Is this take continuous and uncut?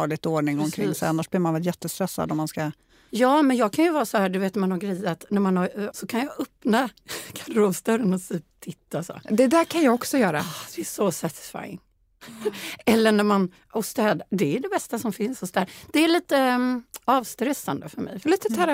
no; 1 cut; at 5.9 s

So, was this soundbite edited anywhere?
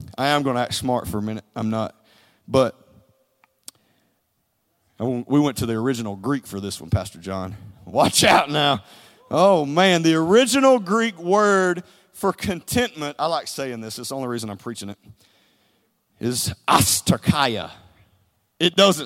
no; 0 cuts

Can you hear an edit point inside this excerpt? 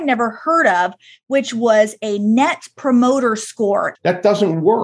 yes; 1 cut; at 3.9 s

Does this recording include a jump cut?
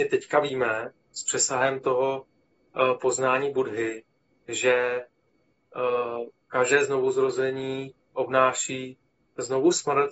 no; 0 cuts

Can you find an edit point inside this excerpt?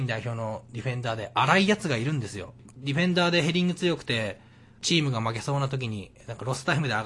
yes; 1 cut; at 2.7 s

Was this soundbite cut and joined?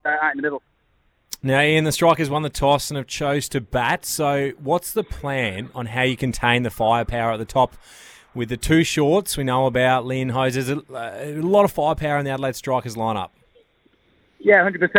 no; 0 cuts

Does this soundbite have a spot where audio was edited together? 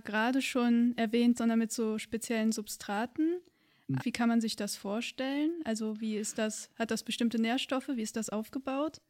yes; 2 cuts; at 1.4 s, 4.0 s

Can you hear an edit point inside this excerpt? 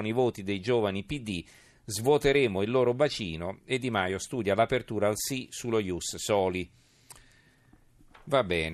no; 0 cuts

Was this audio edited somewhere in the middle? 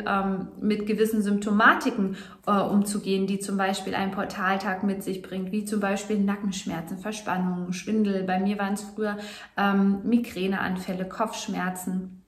no; 0 cuts

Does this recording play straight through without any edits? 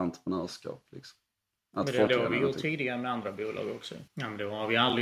no; 2 cuts; at 2.1 s, 4.1 s

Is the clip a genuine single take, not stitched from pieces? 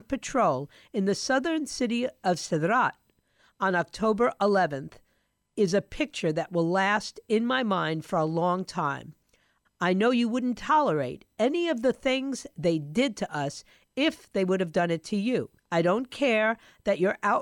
no; 2 cuts; at 9.7 s, 15.6 s

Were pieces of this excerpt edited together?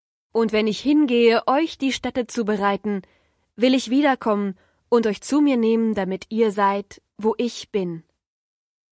no; 0 cuts

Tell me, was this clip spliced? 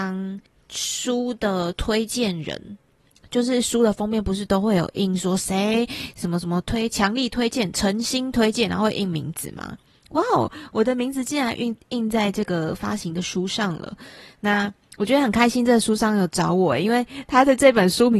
no; 0 cuts

